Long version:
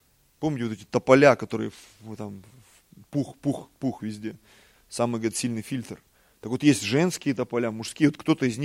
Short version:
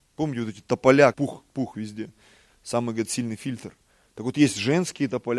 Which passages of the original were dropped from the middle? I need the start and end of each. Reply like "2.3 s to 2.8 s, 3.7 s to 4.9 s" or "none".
1.4 s to 3.4 s